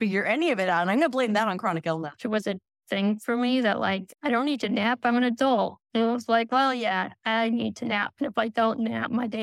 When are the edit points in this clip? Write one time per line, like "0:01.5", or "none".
0:02.2